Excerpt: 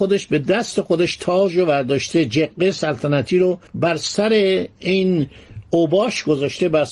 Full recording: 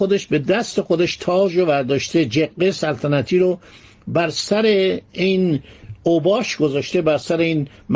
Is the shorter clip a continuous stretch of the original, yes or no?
no